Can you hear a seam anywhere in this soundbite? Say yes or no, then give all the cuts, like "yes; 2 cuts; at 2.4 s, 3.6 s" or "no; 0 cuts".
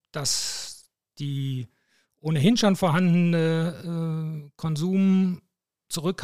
no; 0 cuts